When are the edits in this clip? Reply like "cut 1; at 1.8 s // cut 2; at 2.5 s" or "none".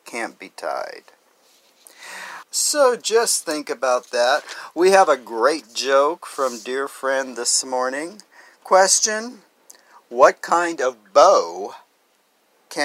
cut 1; at 2.4 s